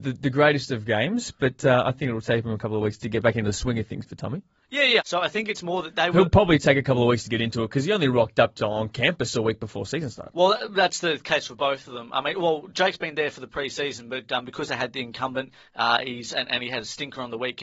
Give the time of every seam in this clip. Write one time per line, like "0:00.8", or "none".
0:05.0